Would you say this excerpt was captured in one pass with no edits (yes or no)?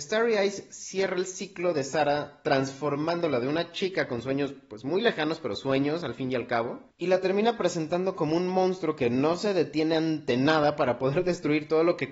yes